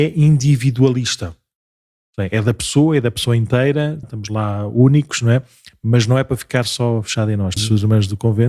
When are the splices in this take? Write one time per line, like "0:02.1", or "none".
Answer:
0:04.0
0:07.6

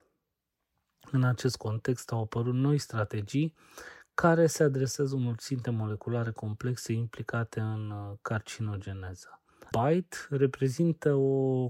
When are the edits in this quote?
0:09.7

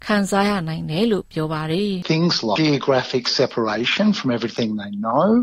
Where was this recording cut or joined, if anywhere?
0:02.6

